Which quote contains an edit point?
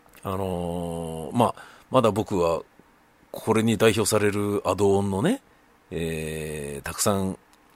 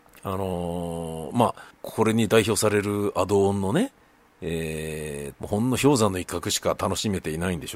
second; 2 cuts; at 1.7 s, 5.3 s

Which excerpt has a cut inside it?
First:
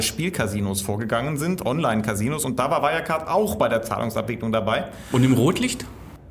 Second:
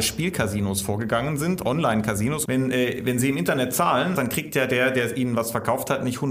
second; 2 cuts; at 2.4 s, 4.2 s

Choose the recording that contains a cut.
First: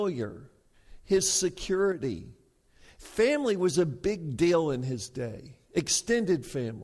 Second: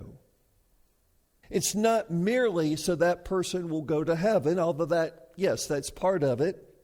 second; 1 cut; at 1.4 s

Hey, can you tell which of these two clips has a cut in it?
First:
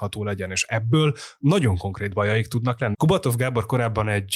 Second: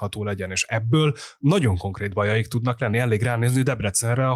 first; 1 cut; at 2.9 s

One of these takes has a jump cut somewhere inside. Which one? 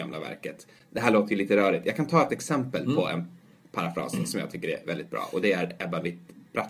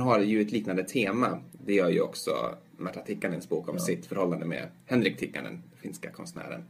second; 1 cut; at 1.6 s

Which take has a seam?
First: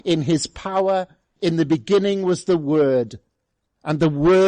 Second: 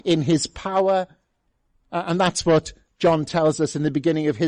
first; 1 cut; at 1.4 s

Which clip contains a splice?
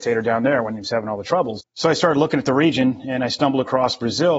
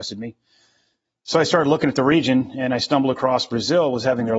first; 1 cut; at 1.6 s

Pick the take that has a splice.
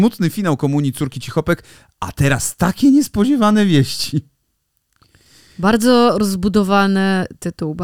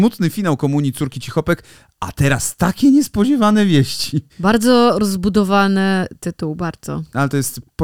second; 1 cut; at 4.3 s

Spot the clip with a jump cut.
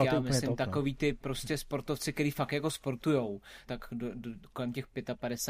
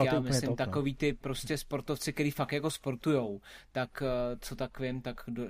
first; 1 cut; at 3.7 s

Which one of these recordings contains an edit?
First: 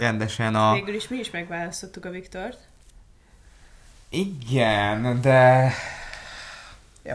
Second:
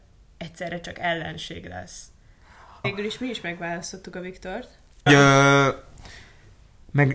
second; 2 cuts; at 2.8 s, 5.1 s

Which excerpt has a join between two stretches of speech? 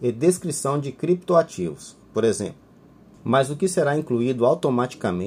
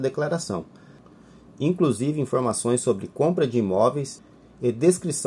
first; 1 cut; at 3.2 s

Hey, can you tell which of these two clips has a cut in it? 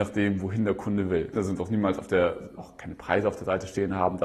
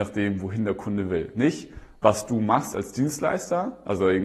first; 2 cuts; at 1.3 s, 2.6 s

